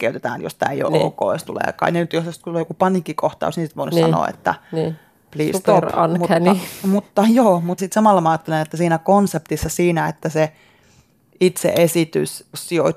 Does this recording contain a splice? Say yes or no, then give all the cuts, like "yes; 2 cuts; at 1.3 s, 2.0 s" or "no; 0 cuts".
no; 0 cuts